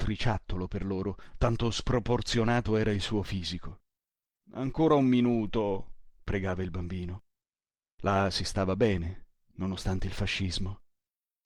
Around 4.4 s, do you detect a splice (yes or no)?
no